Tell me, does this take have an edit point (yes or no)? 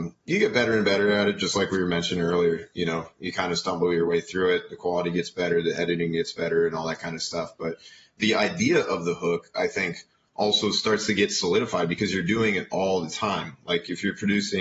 no